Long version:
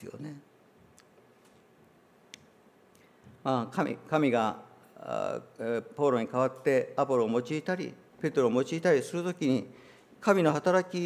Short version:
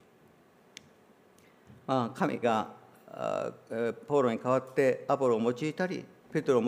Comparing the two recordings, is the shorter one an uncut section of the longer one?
no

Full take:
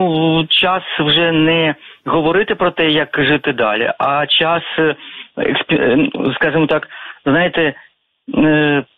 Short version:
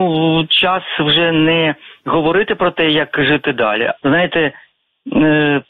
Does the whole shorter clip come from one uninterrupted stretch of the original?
no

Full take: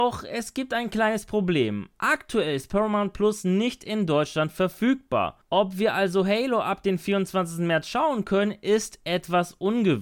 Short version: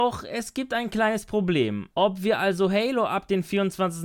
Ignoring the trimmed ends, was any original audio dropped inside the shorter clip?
yes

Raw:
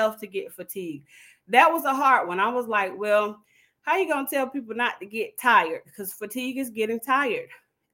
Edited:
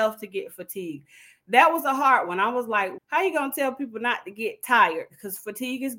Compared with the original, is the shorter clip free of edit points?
no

